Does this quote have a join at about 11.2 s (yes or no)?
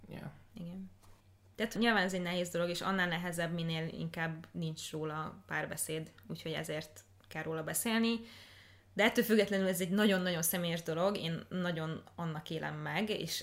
no